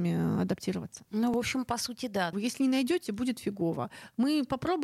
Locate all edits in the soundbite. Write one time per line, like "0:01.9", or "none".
0:01.1
0:02.3